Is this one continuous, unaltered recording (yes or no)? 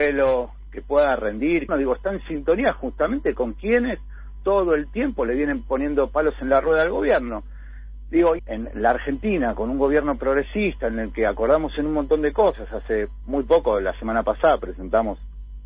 no